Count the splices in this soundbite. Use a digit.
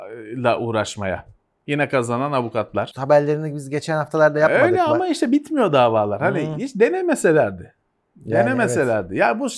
1